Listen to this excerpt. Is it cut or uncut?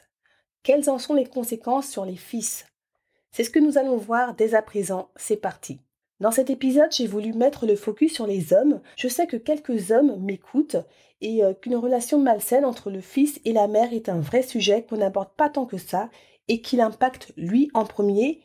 cut